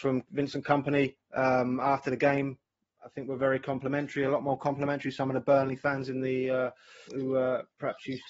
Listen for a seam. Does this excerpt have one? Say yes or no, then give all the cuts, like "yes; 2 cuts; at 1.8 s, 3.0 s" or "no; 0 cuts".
yes; 1 cut; at 7.1 s